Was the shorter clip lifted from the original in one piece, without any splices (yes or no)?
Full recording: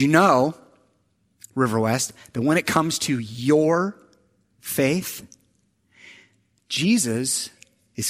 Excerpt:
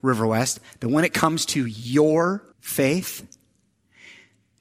no